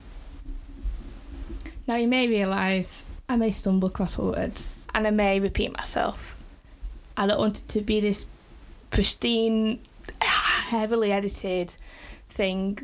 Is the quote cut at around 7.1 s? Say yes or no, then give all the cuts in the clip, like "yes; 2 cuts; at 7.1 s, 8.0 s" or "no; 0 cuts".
yes; 2 cuts; at 4.8 s, 7.1 s